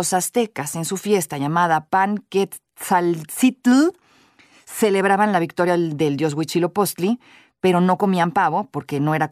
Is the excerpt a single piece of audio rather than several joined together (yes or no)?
yes